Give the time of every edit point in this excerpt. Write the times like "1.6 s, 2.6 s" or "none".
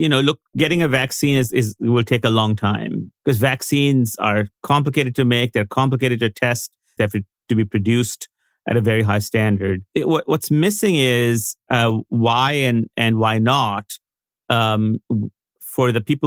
7.0 s, 9.9 s